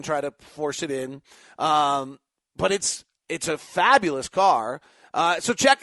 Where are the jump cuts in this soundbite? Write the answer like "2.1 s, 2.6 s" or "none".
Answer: none